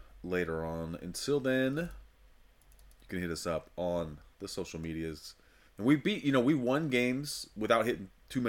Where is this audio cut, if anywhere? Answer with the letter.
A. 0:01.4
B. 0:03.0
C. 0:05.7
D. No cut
C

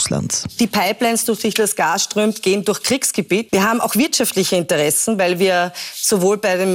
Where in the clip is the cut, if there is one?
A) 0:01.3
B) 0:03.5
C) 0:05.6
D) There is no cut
B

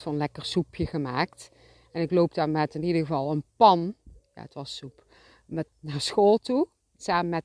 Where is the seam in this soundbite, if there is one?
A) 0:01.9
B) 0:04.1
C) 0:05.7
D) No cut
C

